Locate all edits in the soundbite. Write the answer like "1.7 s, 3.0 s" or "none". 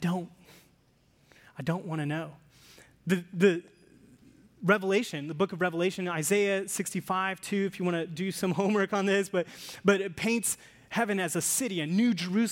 none